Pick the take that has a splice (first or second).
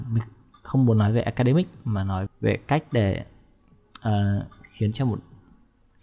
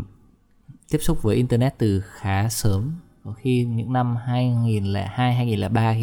first